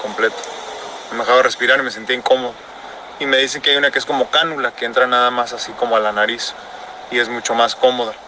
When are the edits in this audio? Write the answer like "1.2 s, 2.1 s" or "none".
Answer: none